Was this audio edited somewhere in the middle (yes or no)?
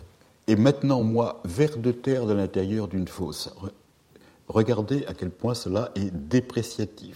no